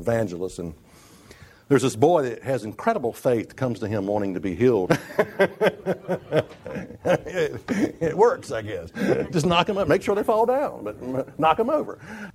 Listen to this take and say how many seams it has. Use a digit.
1